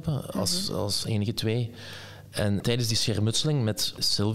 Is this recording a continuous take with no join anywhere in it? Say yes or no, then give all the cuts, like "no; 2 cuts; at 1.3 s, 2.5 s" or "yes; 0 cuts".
no; 1 cut; at 2.6 s